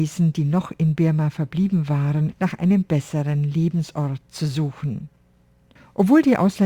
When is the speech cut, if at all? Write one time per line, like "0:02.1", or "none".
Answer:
0:02.3